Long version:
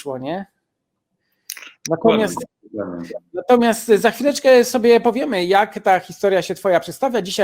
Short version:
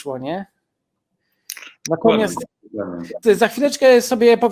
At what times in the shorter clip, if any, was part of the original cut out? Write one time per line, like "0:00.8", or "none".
0:03.2